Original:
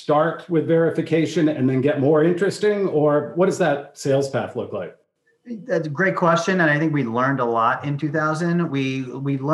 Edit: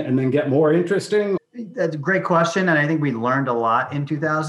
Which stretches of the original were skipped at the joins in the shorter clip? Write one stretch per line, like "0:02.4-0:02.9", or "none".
0:02.9-0:05.3